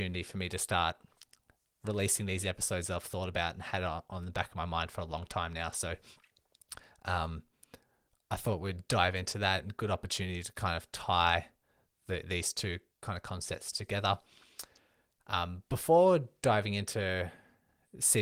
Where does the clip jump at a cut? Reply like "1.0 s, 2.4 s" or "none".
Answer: none